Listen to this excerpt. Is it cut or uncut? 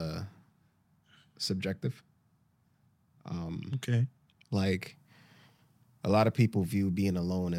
uncut